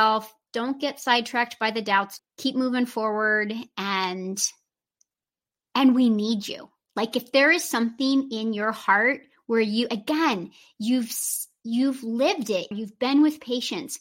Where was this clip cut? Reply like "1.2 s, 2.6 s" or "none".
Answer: 2.2 s, 12.7 s

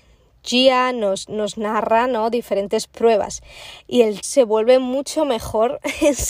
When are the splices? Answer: 4.2 s

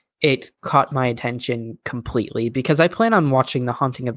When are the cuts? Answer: none

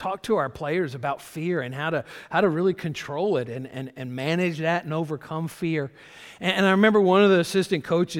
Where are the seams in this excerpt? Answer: none

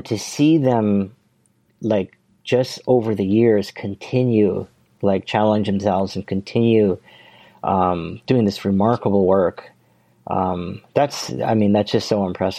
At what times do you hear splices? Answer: none

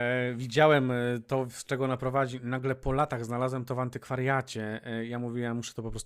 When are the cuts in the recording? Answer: none

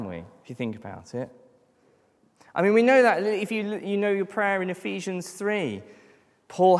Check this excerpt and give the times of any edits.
none

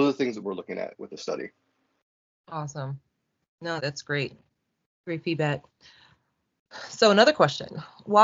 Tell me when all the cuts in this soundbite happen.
3.8 s

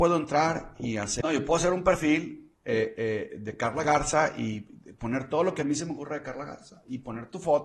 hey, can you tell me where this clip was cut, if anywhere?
1.2 s, 2.5 s

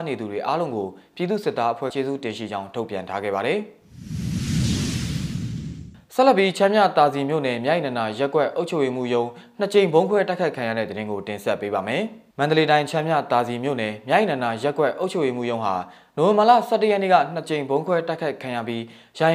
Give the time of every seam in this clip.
1.9 s, 12.3 s

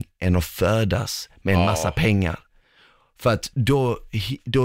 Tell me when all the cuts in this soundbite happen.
none

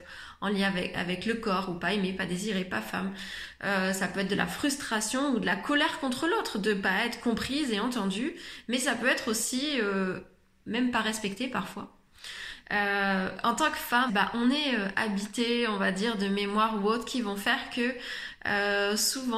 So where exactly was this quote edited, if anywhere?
12.6 s, 14.1 s

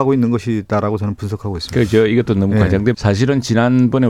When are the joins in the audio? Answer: 2.9 s

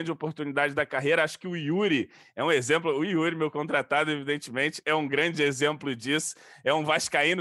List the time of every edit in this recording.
none

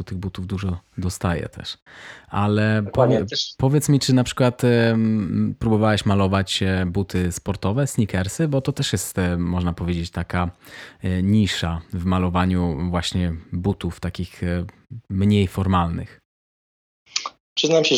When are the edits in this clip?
none

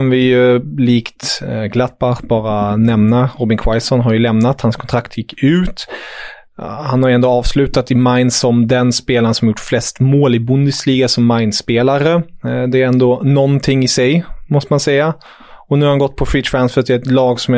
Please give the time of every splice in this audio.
none

